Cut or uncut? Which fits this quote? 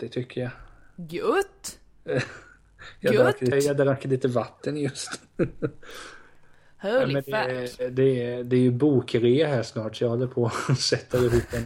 cut